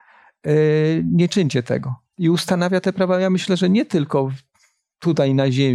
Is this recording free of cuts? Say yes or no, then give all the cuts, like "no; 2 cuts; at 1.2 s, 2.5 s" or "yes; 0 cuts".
yes; 0 cuts